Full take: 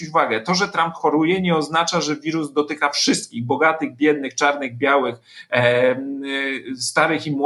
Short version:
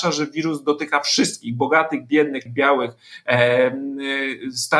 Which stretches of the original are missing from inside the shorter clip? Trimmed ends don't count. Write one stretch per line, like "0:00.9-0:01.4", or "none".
0:04.3-0:04.7